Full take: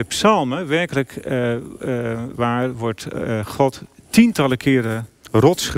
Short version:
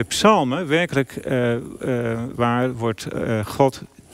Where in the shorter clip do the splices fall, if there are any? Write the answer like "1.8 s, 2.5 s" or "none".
none